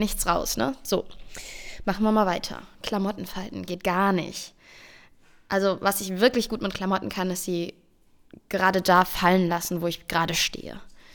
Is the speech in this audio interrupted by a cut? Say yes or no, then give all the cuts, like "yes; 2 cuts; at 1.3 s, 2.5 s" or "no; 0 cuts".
no; 0 cuts